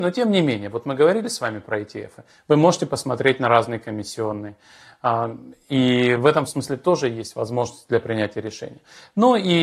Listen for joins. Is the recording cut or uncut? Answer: uncut